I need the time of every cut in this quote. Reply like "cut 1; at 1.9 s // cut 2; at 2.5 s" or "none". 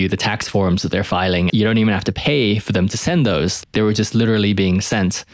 cut 1; at 1.5 s